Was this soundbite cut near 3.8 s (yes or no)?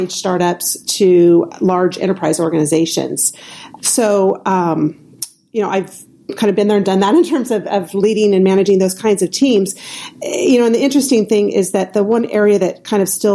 yes